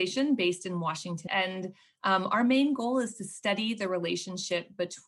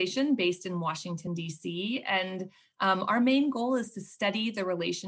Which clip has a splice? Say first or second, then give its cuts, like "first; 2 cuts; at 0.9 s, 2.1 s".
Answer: first; 1 cut; at 1.3 s